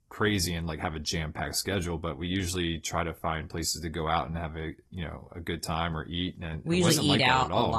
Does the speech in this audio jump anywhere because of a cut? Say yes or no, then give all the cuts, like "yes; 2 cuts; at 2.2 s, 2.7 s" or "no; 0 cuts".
no; 0 cuts